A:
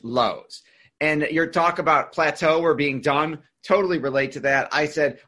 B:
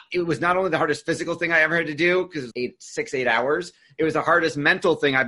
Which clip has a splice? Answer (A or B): B